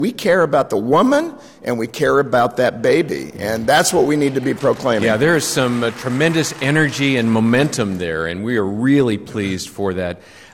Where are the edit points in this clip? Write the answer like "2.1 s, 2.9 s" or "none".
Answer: none